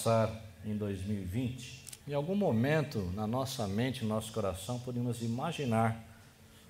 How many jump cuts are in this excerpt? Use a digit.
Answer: 1